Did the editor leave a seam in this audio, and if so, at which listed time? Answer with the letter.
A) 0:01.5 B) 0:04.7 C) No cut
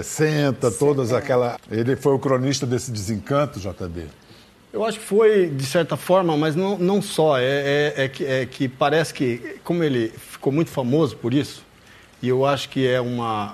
A